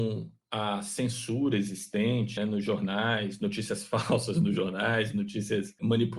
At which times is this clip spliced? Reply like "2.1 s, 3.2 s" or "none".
2.4 s